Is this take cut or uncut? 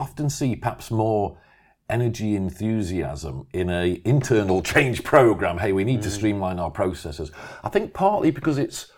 uncut